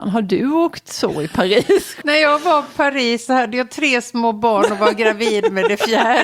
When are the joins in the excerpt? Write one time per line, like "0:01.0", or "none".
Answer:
0:02.0